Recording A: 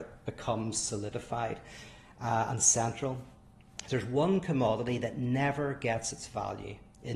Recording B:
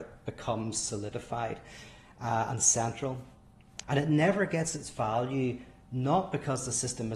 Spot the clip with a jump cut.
B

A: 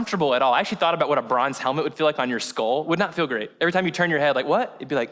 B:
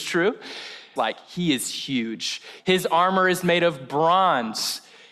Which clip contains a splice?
B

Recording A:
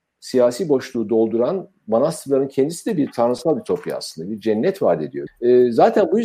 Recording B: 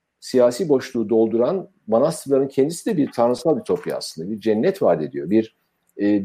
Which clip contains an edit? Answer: A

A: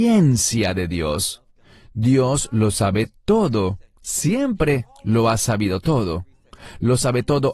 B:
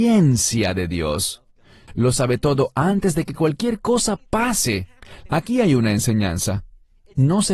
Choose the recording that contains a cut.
B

